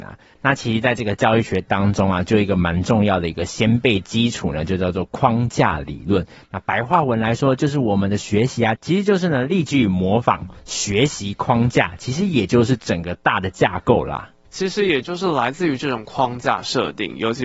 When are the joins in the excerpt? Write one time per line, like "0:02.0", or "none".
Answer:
0:14.5